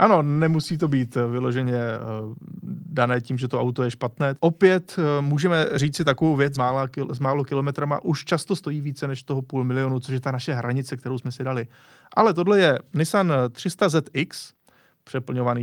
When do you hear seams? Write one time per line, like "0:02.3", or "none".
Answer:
0:04.3
0:06.5